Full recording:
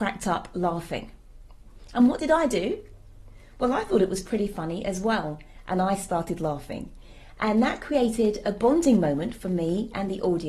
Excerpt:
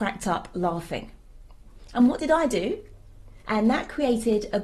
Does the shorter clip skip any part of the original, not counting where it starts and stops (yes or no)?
yes